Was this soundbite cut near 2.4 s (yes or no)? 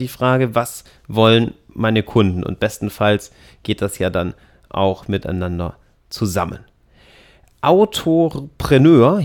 no